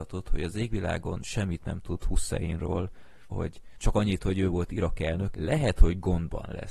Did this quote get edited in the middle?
yes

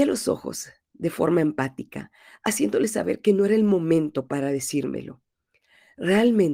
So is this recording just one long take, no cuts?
yes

